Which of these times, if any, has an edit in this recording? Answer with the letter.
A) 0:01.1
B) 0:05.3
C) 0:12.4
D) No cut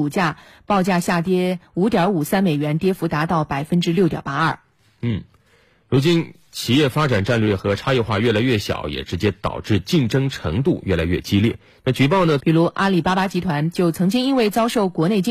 C